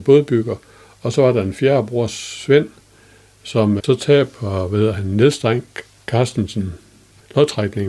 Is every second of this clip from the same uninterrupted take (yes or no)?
no